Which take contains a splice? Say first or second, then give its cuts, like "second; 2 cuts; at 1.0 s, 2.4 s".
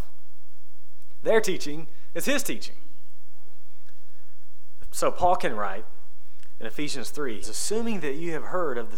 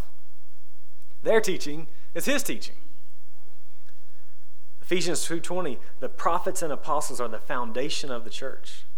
first; 2 cuts; at 4.8 s, 7.4 s